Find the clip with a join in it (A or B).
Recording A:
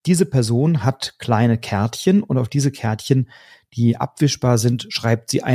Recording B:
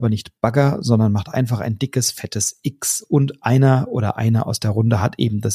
B